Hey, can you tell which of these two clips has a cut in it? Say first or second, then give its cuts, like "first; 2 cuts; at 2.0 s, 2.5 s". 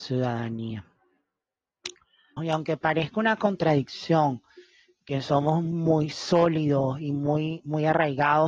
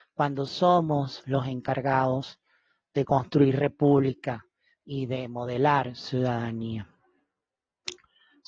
first; 1 cut; at 2.4 s